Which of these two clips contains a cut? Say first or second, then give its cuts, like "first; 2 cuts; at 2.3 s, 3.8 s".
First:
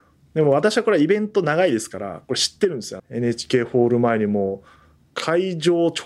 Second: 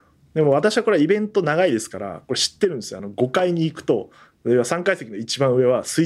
first; 1 cut; at 3.0 s